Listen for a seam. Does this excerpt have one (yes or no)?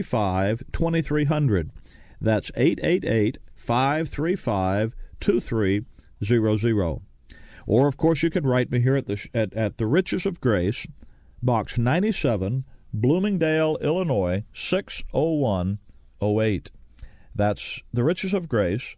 no